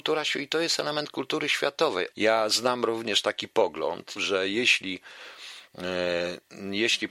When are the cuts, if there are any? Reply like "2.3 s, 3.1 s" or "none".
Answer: 2.1 s, 4.2 s